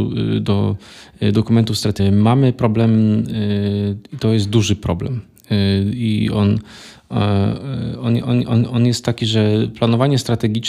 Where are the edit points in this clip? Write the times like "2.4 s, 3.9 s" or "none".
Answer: 2.0 s

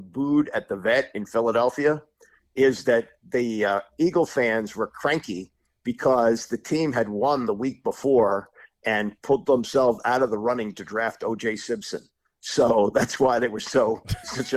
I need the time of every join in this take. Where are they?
none

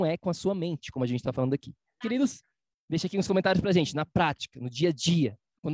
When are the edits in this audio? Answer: 2.0 s

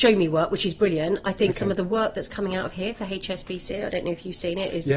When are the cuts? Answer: none

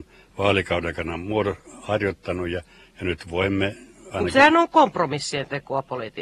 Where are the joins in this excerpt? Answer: none

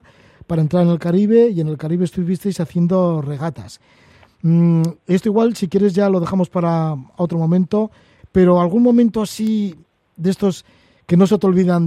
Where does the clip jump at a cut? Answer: 8.2 s

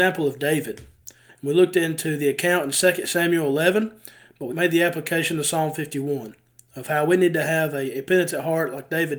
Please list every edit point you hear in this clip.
1.3 s, 4.5 s

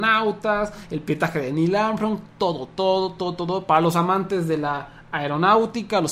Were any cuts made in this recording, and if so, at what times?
none

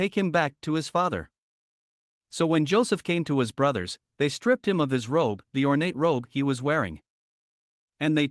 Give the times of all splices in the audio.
none

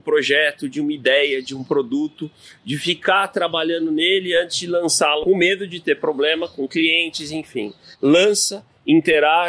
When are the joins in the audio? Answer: 7.9 s

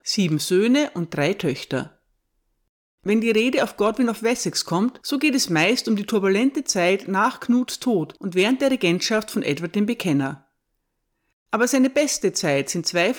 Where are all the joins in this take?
none

